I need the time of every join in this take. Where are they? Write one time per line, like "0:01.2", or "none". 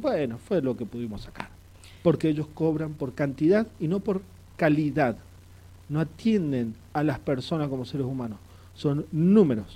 none